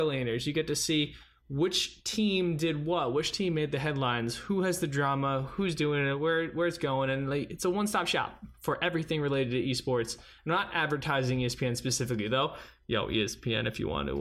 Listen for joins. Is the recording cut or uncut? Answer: uncut